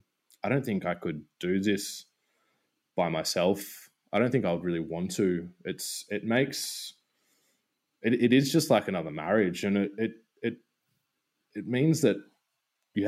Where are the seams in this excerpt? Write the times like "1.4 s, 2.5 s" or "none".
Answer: none